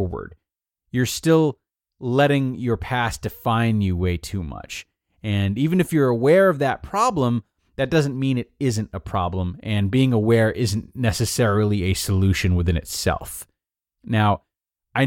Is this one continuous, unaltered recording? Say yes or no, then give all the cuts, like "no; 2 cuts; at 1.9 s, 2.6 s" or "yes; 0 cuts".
yes; 0 cuts